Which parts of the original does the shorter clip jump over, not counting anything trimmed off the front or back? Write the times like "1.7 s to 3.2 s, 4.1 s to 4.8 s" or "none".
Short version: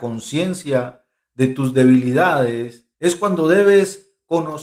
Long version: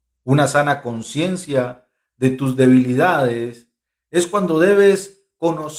3.7 s to 4.0 s